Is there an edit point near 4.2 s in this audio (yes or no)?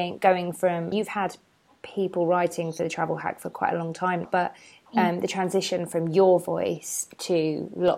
yes